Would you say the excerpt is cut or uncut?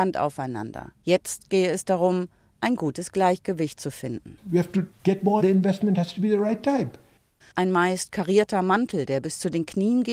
cut